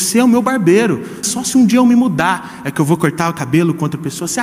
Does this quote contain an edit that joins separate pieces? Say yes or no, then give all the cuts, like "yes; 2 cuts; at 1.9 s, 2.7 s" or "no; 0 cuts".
yes; 1 cut; at 1.2 s